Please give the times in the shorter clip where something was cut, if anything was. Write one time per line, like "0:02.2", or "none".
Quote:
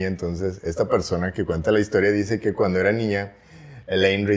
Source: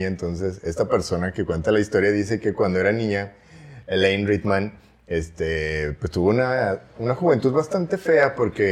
none